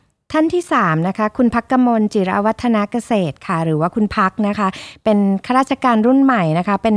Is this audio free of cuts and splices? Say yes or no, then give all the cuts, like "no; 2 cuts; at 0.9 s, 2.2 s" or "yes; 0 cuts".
yes; 0 cuts